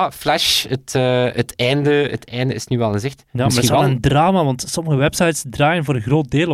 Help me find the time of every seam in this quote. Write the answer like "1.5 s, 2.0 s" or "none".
none